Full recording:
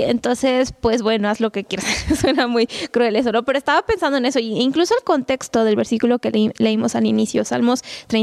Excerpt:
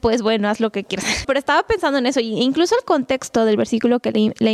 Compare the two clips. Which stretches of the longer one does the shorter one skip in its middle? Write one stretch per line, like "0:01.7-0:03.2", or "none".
0:02.0-0:03.4